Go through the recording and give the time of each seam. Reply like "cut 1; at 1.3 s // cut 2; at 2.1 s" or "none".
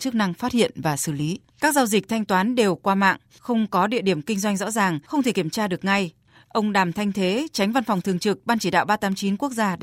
cut 1; at 1.4 s